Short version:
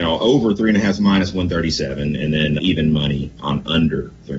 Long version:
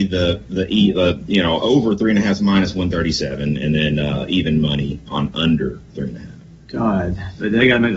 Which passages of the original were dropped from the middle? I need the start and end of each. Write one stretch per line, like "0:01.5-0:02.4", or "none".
0:04.0-0:04.3